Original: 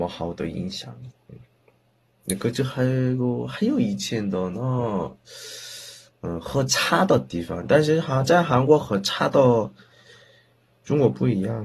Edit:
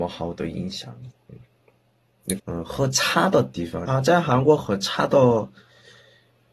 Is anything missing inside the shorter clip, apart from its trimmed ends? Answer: yes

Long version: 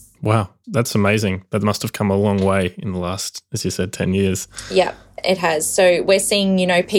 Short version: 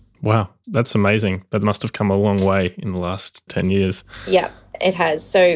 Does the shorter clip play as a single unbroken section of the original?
no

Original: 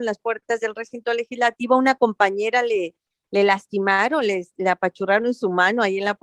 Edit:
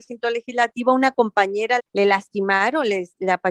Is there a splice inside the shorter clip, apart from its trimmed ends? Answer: yes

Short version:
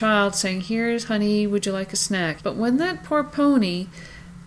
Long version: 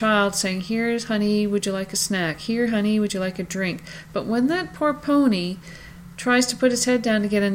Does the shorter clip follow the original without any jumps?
no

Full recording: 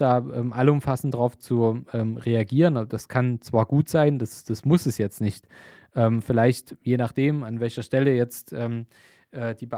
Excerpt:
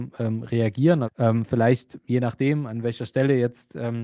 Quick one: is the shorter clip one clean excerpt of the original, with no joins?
no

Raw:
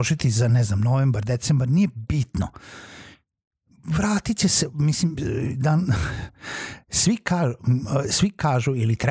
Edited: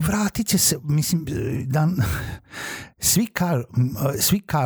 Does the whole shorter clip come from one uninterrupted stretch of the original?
yes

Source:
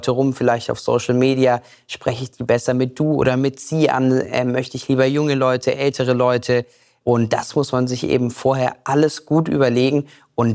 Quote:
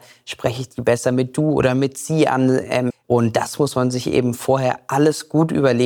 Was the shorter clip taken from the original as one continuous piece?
no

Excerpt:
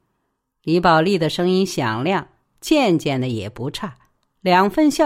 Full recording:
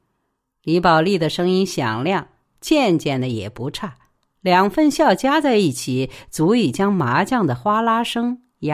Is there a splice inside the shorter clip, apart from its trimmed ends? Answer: no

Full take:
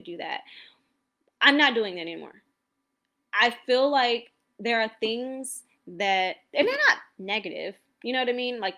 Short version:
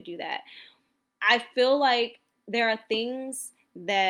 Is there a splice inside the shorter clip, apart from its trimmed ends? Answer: yes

